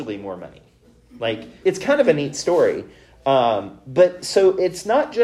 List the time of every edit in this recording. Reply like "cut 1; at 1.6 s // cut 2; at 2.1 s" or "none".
cut 1; at 1.6 s